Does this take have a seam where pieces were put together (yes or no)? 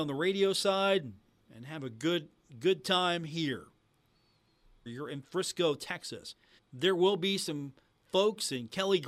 yes